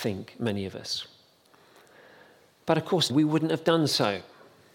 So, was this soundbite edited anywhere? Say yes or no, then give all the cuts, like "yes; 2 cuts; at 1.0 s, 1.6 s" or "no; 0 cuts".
yes; 1 cut; at 3.1 s